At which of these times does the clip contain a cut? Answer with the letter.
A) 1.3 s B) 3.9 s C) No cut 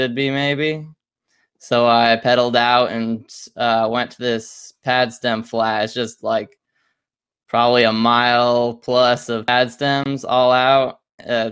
C